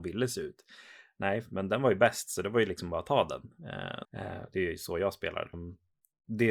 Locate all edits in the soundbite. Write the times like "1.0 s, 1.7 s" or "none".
4.0 s, 5.5 s